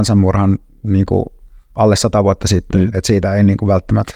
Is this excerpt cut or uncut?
uncut